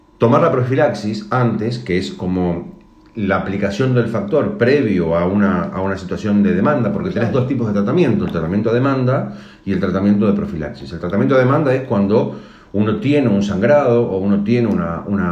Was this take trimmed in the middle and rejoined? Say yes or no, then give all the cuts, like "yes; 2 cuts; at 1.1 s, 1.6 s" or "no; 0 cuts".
no; 0 cuts